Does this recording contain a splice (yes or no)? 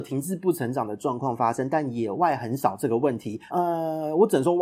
yes